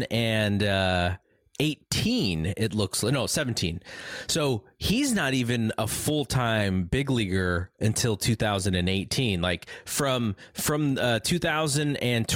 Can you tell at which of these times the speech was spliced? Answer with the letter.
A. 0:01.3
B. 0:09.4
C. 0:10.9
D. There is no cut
D